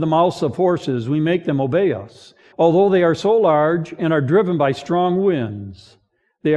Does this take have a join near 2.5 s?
yes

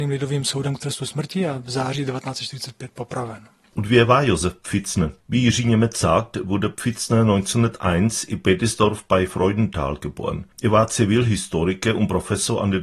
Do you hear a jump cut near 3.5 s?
no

